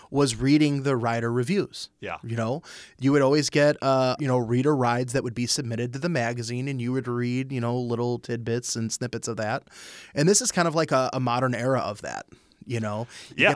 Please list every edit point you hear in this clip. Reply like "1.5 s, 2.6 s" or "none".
4.2 s